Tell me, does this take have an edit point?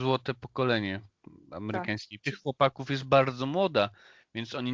yes; 1 cut; at 2.2 s

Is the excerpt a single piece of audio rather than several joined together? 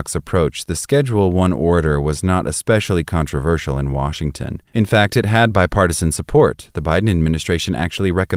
no; 1 cut; at 4.7 s

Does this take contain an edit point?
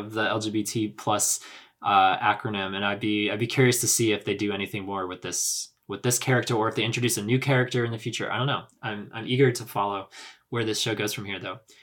no; 0 cuts

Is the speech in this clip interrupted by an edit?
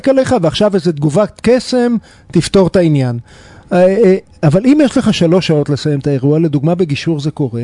no; 0 cuts

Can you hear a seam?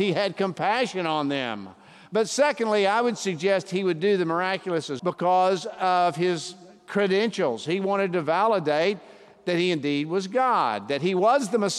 yes; 1 cut; at 5.0 s

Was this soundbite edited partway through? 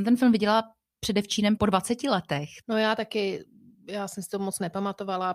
yes; 1 cut; at 2.6 s

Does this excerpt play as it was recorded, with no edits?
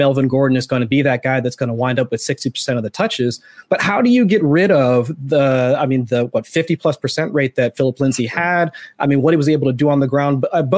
yes; 0 cuts

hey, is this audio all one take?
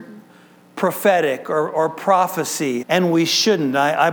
no; 1 cut; at 2.8 s

